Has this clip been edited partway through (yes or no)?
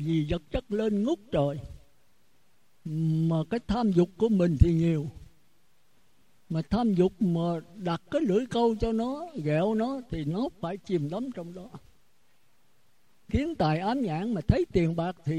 no